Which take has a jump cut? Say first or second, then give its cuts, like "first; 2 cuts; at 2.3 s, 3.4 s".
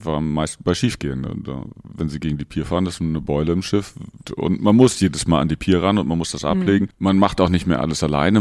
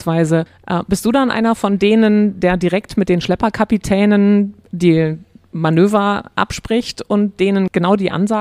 first; 1 cut; at 4.2 s